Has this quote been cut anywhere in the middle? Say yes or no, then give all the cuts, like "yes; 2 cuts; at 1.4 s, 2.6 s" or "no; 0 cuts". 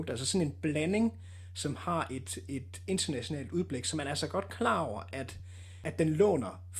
no; 0 cuts